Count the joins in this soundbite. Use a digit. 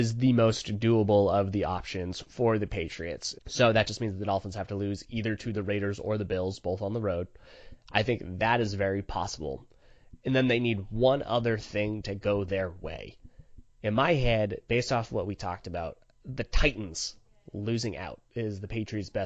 1